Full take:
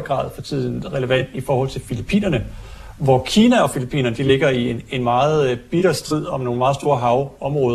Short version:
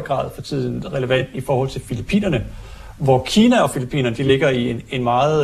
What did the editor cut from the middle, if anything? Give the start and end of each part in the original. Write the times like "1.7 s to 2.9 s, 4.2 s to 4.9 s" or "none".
none